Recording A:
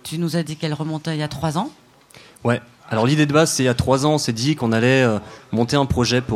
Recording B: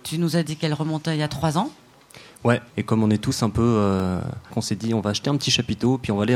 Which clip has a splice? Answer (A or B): B